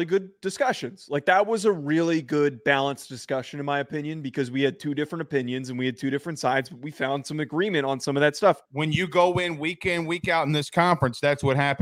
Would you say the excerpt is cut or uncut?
cut